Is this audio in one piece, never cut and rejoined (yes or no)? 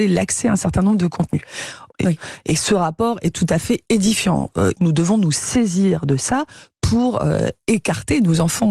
no